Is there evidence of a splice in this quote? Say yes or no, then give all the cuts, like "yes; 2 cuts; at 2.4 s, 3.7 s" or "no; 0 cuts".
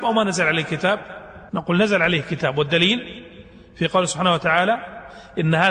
yes; 1 cut; at 1.5 s